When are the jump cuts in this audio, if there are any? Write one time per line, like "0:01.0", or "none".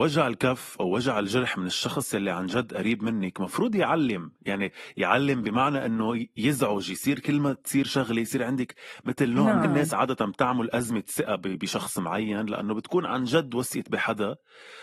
0:09.6